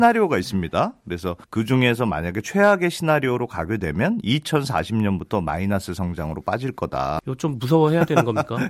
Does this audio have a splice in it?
yes; 2 cuts; at 1.4 s, 7.2 s

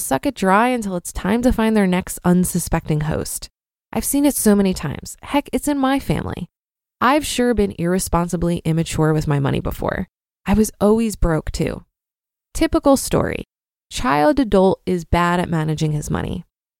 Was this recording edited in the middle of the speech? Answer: no; 0 cuts

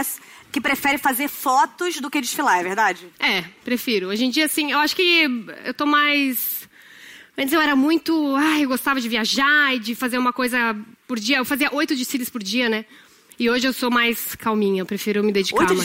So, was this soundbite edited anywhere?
yes; 1 cut; at 3.1 s

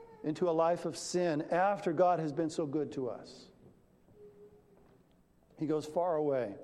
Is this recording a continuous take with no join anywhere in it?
yes; 0 cuts

